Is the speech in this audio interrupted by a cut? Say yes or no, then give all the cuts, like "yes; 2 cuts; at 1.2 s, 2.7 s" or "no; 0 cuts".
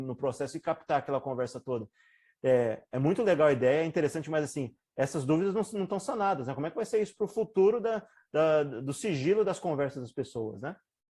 no; 0 cuts